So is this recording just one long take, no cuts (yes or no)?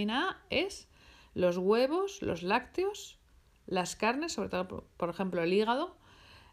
yes